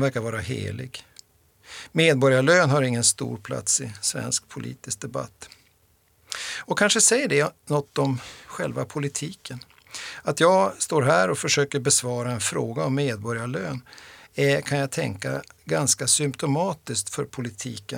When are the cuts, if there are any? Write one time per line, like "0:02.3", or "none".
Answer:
none